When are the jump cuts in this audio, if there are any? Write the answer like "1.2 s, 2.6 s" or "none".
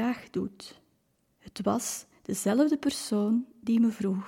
1.2 s